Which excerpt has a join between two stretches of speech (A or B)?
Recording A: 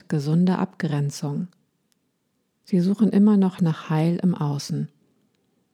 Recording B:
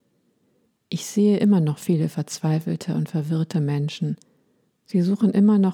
A